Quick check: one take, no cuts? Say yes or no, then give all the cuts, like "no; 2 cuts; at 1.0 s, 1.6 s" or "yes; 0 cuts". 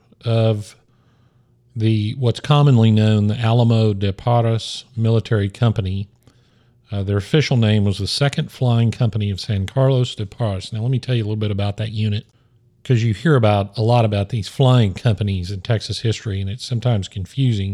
yes; 0 cuts